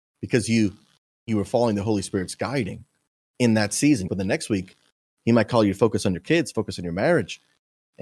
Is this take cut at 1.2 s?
no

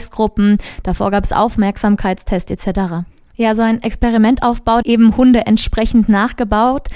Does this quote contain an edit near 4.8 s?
yes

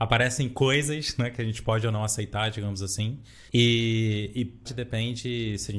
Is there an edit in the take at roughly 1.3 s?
no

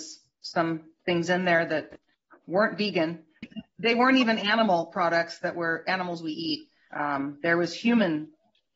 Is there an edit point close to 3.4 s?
yes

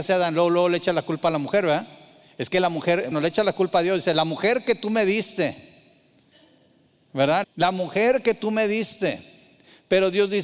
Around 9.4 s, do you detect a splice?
no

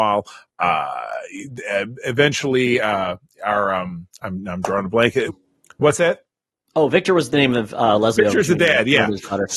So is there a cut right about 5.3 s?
yes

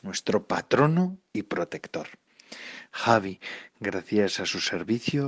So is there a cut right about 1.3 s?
no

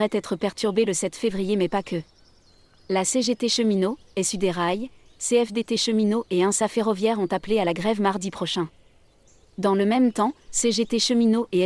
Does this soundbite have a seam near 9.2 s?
no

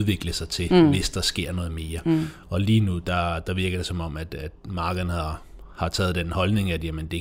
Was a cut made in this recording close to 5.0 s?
no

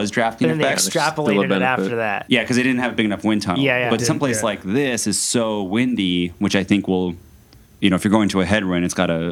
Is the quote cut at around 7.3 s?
no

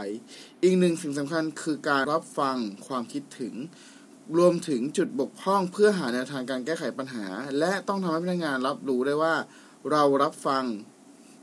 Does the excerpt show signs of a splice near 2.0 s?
yes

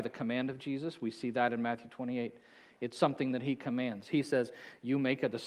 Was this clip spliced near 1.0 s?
no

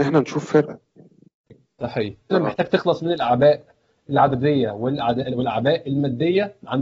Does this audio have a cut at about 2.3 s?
yes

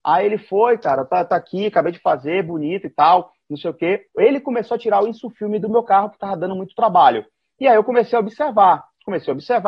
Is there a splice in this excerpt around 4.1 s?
yes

